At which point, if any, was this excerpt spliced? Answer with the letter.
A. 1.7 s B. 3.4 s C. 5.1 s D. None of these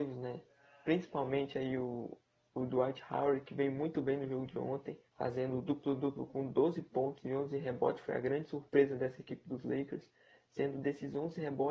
C